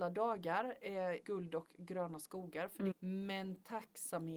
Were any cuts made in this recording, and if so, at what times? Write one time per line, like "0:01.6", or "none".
0:01.2
0:02.9

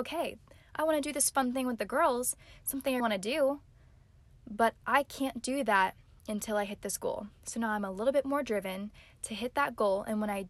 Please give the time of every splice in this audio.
0:03.0

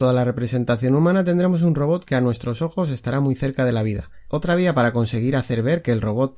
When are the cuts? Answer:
0:04.3

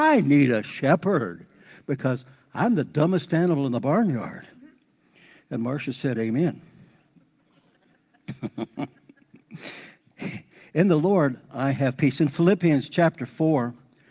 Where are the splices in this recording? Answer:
none

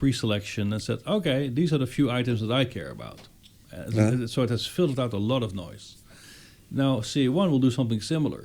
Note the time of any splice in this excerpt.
none

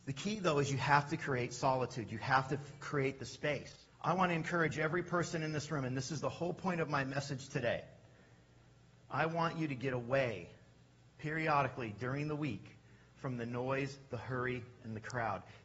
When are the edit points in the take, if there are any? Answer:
0:03.9

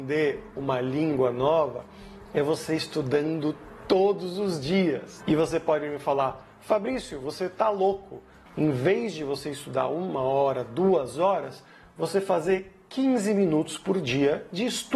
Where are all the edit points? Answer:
0:08.5

